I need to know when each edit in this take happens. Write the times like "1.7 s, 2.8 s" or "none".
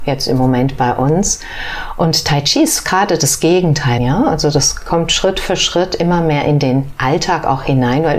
4.0 s